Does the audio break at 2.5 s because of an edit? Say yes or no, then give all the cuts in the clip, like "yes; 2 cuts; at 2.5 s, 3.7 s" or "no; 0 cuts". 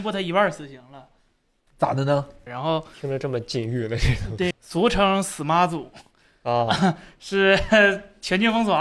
yes; 2 cuts; at 2.5 s, 4.5 s